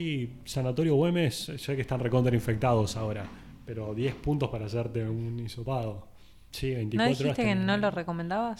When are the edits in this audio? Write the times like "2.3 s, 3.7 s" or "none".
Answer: 6.5 s